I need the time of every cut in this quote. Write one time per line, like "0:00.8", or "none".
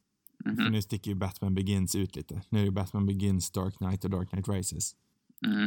none